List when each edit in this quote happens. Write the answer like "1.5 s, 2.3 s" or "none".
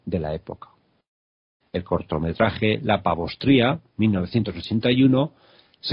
1.6 s, 3.9 s